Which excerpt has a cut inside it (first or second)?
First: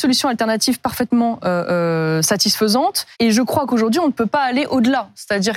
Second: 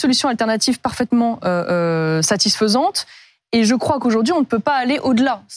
first